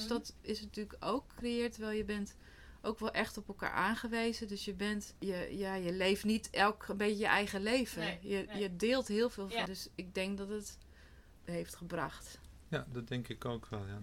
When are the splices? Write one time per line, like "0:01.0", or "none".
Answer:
0:09.7
0:11.4